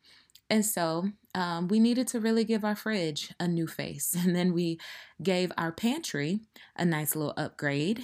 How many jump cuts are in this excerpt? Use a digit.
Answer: 0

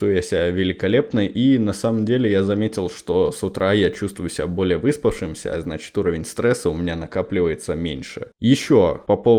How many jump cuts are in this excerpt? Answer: 1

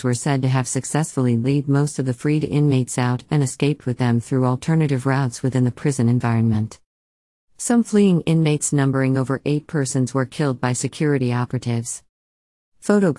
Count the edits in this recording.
0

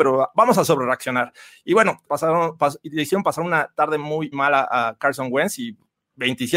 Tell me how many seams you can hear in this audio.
2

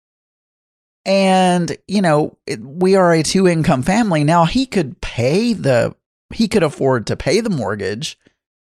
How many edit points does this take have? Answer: 0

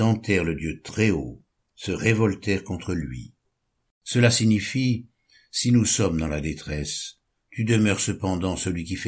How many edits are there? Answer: 1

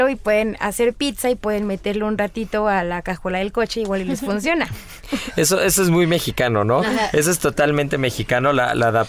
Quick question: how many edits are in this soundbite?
0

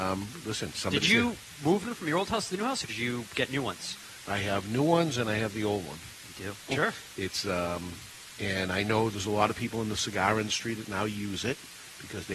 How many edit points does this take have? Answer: 2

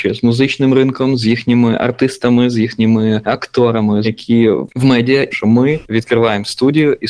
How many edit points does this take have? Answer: 2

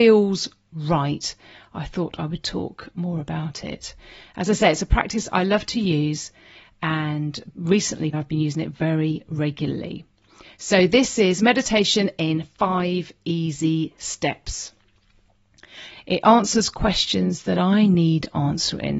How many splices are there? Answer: 2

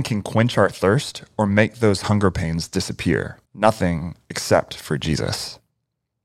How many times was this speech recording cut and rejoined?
1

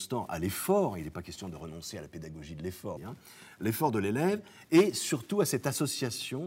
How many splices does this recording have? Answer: 1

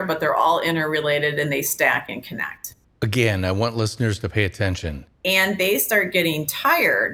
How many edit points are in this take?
1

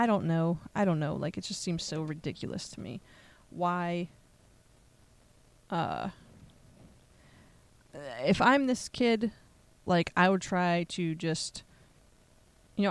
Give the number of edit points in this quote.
0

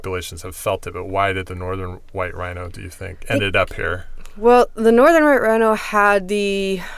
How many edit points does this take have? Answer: 1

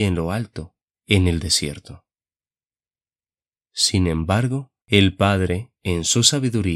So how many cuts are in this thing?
3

